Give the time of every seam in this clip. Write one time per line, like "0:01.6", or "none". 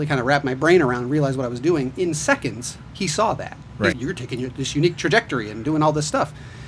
0:03.9